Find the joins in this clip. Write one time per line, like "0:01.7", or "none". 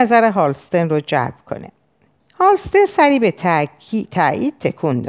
0:02.2